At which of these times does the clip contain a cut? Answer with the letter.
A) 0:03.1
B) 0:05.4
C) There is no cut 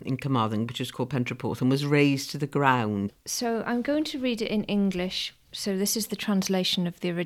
A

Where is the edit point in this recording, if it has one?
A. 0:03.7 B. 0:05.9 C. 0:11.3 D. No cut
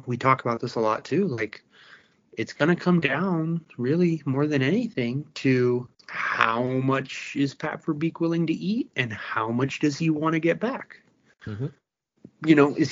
B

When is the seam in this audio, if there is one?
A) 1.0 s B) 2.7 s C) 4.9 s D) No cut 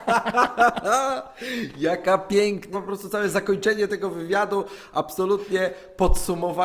B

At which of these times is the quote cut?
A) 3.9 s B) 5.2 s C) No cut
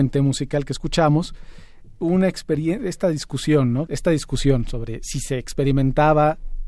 A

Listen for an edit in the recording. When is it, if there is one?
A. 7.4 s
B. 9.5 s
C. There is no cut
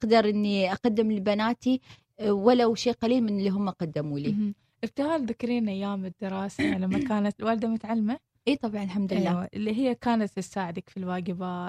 A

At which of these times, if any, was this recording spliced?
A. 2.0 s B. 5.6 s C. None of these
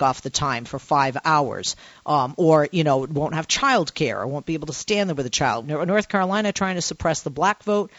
B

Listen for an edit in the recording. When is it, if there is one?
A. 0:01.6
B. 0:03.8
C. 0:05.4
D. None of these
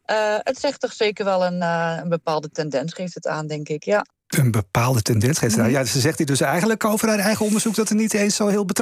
D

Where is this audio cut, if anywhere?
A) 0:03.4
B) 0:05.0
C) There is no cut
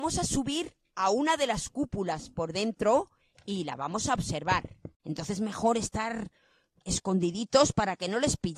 B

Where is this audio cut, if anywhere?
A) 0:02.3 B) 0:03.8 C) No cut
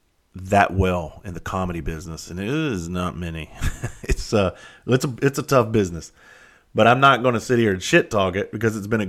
C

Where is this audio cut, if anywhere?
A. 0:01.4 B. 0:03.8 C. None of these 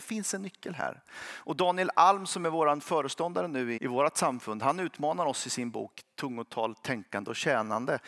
B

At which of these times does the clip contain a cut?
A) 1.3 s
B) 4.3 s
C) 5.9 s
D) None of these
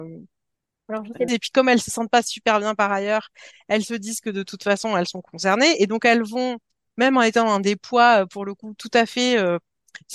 A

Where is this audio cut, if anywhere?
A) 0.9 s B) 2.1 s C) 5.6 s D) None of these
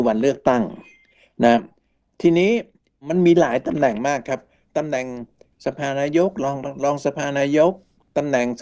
D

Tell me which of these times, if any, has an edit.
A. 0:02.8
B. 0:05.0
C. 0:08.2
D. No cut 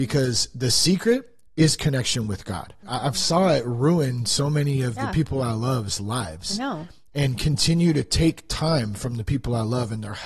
A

